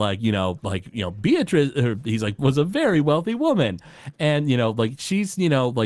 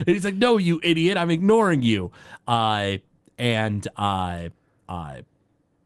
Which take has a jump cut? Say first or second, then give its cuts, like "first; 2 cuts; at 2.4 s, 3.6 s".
first; 1 cut; at 2.4 s